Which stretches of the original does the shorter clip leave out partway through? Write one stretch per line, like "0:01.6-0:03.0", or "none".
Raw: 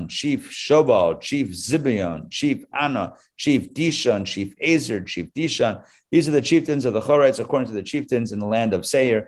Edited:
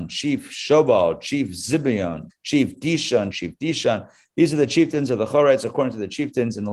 0:02.3-0:03.2
0:04.2-0:05.1